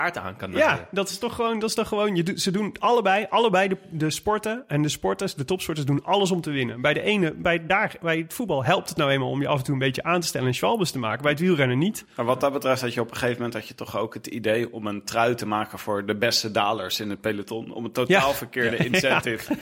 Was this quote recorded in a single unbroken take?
yes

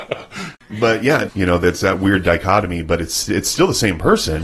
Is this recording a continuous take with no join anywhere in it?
no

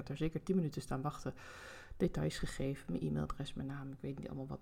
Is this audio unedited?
yes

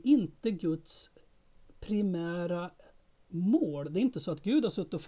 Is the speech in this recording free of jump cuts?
yes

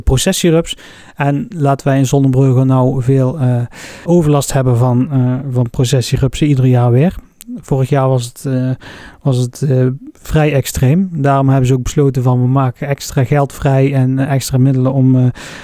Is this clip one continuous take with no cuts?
no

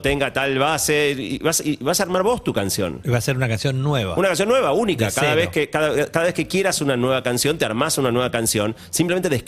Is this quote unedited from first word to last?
yes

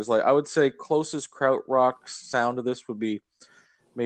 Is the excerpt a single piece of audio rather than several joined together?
yes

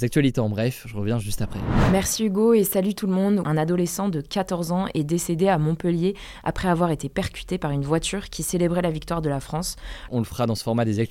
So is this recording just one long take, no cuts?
no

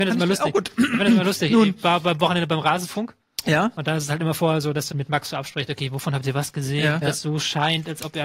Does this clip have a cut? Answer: yes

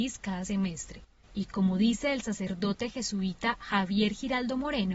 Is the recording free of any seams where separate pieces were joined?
no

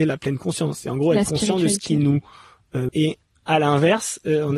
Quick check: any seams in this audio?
yes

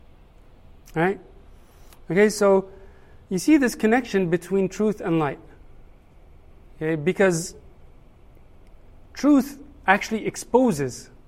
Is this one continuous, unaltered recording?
no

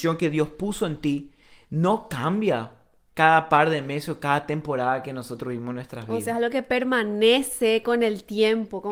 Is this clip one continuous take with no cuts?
no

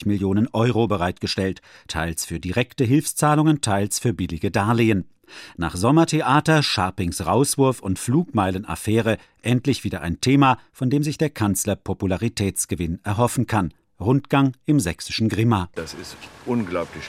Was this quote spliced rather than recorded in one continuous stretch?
no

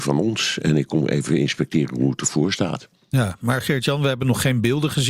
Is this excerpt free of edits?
yes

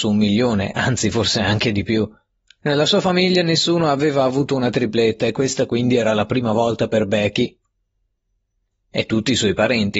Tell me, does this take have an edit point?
no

